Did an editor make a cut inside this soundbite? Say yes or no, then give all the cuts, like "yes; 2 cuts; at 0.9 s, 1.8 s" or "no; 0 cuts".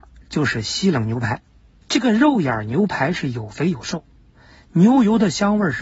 yes; 1 cut; at 1.8 s